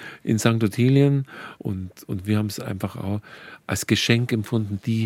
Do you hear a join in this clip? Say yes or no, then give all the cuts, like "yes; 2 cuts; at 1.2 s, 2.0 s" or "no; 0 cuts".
yes; 1 cut; at 1.6 s